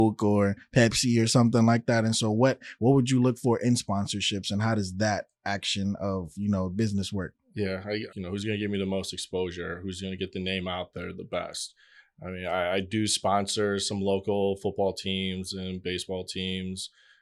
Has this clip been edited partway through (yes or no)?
yes